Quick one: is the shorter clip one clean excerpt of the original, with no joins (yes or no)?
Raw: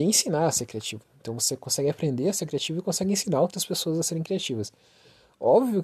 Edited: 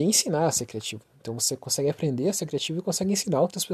yes